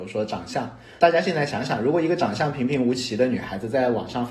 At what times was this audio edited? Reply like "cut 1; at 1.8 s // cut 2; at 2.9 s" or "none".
none